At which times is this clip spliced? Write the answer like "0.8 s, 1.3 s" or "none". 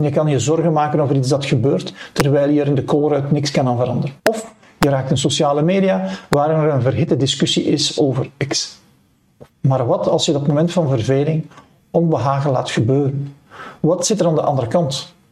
4.2 s, 9.5 s